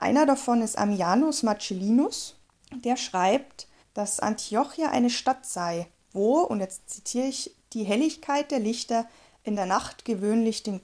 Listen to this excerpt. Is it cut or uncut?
uncut